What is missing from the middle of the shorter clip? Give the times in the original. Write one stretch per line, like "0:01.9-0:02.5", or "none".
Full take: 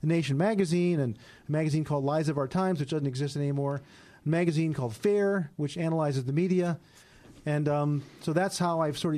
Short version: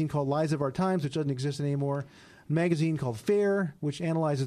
none